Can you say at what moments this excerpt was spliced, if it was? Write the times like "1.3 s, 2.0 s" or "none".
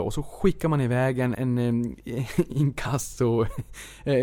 1.3 s